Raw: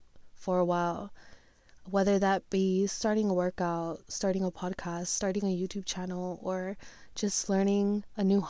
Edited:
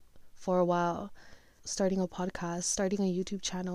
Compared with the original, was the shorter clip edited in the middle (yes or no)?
yes